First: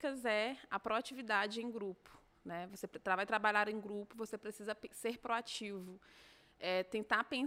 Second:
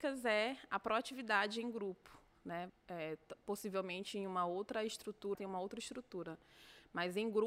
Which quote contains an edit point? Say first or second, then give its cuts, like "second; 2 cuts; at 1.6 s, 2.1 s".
second; 2 cuts; at 2.7 s, 5.3 s